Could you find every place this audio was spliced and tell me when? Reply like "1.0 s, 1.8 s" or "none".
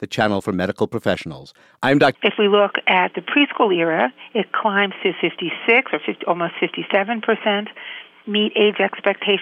2.1 s